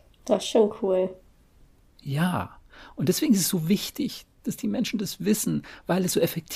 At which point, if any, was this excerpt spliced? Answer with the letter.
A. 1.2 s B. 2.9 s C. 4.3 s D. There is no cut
D